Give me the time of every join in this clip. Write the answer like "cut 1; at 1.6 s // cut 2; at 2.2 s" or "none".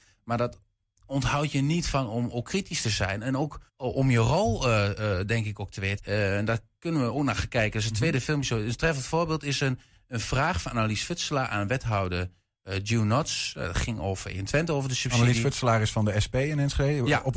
cut 1; at 3.7 s // cut 2; at 6.0 s